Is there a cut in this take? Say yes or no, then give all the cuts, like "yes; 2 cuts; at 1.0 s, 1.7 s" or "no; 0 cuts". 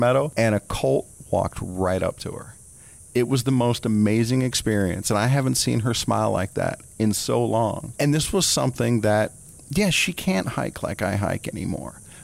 no; 0 cuts